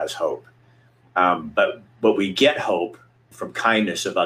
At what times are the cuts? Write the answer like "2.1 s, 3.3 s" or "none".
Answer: 3.3 s